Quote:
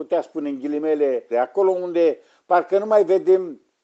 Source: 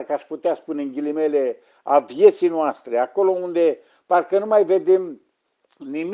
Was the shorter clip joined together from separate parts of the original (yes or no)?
yes